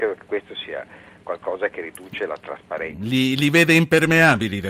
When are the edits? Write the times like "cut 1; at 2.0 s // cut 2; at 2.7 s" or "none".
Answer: none